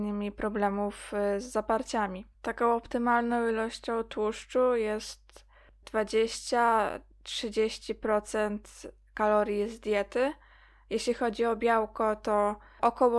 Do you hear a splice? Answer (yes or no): yes